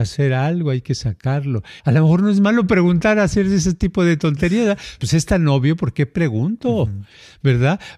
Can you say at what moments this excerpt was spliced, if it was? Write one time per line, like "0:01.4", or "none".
0:01.8
0:05.0